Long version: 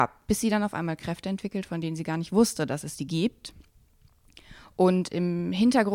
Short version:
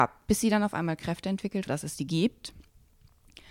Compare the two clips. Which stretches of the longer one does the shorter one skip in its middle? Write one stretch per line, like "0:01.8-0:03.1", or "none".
0:01.7-0:02.7